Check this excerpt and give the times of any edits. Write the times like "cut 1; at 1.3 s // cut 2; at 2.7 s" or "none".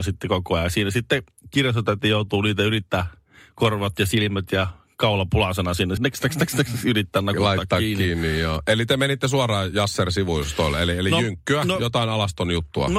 cut 1; at 6.0 s